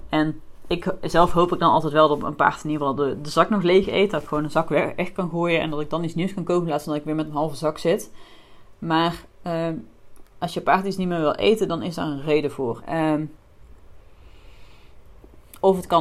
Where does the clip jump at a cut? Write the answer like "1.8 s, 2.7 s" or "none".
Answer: 12.8 s